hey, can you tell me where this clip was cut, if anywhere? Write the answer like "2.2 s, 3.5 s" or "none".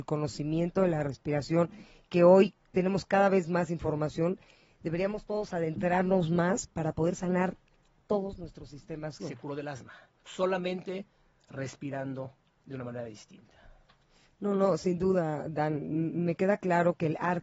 9.2 s